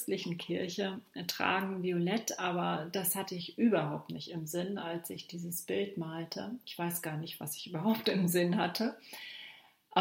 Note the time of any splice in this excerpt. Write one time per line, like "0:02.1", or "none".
none